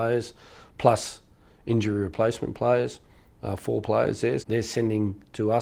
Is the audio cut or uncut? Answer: cut